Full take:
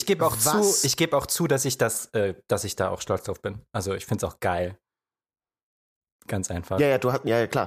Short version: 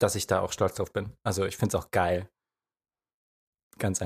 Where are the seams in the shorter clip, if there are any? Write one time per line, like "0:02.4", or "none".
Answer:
none